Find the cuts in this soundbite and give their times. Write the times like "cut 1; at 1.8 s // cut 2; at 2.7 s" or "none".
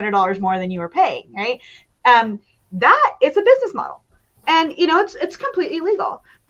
none

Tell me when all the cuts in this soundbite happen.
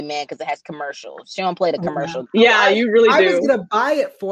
cut 1; at 2.3 s

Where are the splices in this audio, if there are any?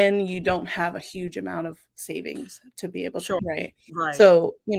cut 1; at 3.4 s

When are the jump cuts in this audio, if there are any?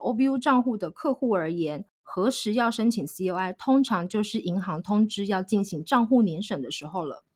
none

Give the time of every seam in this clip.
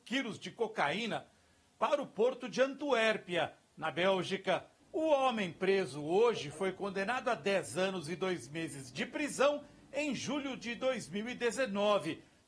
cut 1; at 4.8 s

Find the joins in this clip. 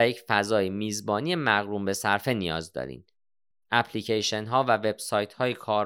none

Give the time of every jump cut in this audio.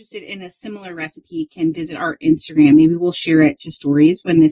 none

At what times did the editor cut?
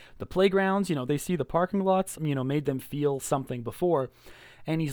cut 1; at 1.1 s // cut 2; at 2.1 s

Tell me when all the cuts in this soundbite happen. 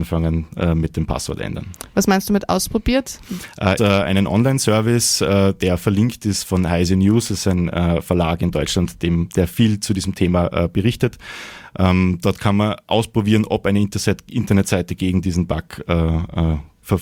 cut 1; at 3.8 s

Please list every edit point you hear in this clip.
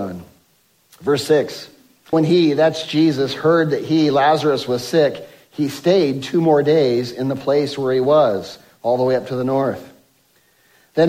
cut 1; at 2.1 s

